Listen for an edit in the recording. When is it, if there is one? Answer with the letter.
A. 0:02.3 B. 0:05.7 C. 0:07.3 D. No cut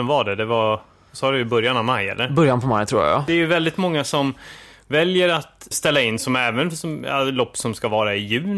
B